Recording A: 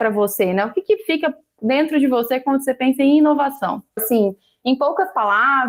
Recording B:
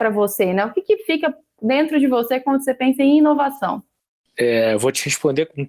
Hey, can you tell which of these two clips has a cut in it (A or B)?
A